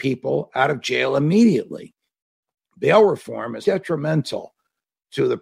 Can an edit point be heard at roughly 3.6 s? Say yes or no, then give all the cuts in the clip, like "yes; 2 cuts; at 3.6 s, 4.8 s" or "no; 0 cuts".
yes; 1 cut; at 3.6 s